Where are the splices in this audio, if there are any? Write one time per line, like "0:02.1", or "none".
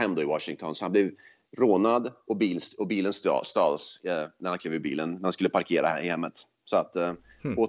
none